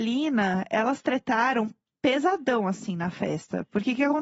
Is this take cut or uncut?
uncut